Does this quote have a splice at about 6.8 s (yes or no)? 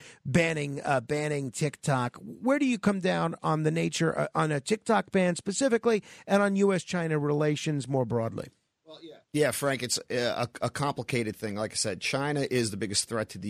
no